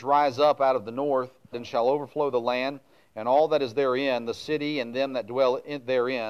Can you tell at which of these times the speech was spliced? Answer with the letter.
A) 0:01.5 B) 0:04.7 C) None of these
A